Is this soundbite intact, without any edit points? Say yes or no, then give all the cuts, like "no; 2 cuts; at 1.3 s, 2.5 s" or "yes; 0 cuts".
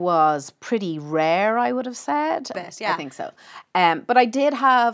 no; 1 cut; at 2.5 s